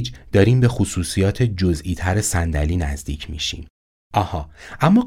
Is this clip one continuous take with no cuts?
no; 1 cut; at 3.9 s

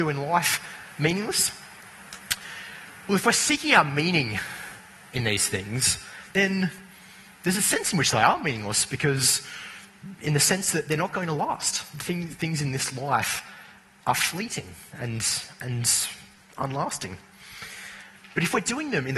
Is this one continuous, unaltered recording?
yes; 0 cuts

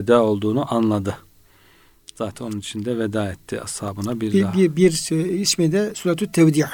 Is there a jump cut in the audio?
no; 0 cuts

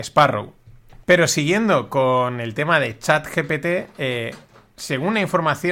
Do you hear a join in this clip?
yes; 1 cut; at 1.0 s

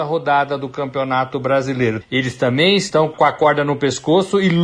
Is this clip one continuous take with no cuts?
no; 1 cut; at 2.0 s

